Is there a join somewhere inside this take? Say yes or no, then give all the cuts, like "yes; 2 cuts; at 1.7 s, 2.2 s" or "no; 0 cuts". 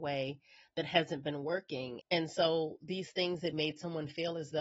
yes; 2 cuts; at 2.0 s, 3.5 s